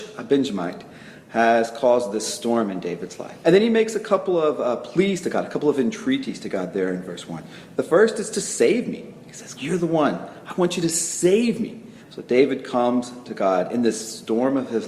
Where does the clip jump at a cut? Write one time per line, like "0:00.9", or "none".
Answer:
0:03.4
0:09.6
0:12.0